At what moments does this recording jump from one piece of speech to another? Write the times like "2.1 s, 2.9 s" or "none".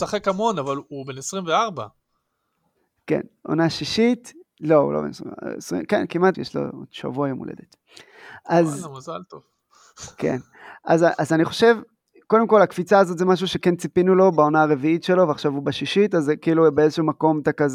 6.3 s